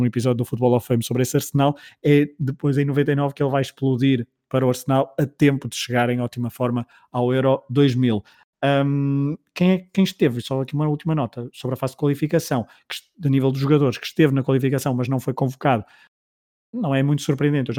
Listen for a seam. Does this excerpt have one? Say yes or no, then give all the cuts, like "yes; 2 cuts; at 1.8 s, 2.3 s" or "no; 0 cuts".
no; 0 cuts